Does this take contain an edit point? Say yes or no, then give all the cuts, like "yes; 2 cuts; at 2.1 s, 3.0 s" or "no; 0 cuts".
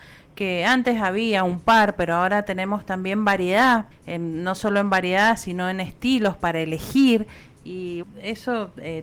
yes; 2 cuts; at 3.9 s, 8.0 s